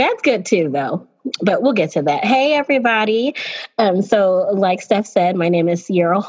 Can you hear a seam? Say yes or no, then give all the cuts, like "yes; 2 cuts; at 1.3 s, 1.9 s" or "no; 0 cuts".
no; 0 cuts